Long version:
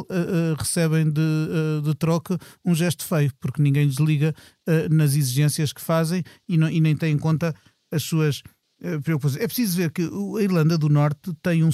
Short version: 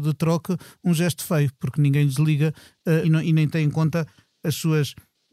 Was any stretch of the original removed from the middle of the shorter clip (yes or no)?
yes